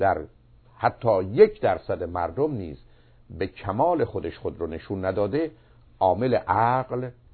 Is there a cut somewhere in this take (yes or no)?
no